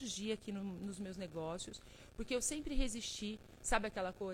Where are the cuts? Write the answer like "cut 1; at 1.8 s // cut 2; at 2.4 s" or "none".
none